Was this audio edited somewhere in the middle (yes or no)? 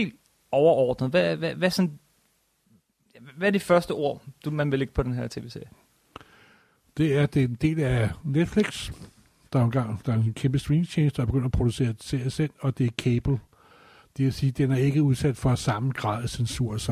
no